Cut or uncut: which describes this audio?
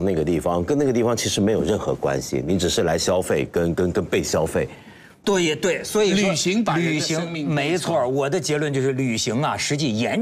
cut